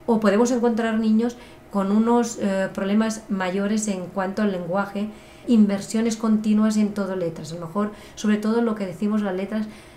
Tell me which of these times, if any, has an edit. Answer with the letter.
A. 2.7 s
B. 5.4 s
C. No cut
B